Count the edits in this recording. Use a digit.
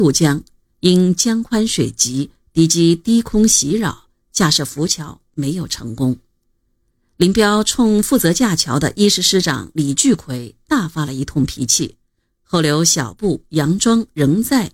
0